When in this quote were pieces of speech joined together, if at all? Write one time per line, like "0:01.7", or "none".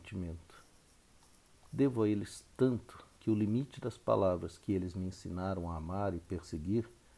0:01.6
0:03.1